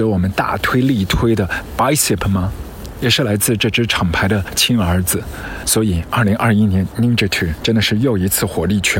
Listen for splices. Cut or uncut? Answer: uncut